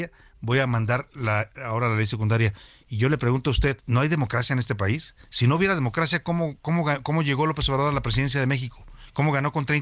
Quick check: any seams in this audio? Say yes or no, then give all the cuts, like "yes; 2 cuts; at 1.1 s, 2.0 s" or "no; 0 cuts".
yes; 1 cut; at 3.8 s